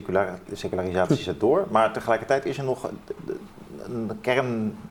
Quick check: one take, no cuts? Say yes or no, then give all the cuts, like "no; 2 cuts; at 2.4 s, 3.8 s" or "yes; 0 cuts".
yes; 0 cuts